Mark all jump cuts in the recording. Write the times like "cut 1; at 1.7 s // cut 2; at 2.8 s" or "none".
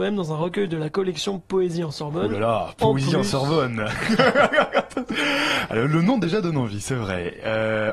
none